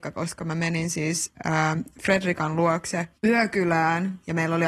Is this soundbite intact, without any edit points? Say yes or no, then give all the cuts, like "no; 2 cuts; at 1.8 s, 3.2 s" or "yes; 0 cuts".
no; 1 cut; at 3.2 s